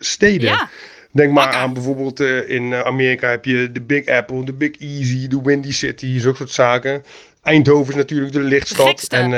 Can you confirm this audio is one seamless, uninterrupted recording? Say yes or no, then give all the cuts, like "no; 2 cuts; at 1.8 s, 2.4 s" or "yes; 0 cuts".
yes; 0 cuts